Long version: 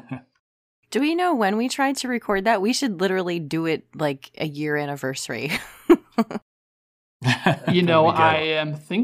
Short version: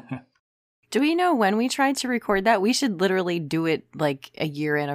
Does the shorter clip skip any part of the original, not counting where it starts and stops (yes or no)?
no